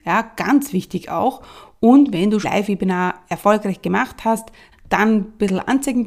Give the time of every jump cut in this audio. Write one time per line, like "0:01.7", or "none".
0:02.4
0:04.7